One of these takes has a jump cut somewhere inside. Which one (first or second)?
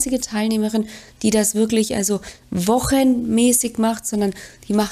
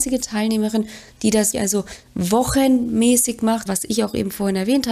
second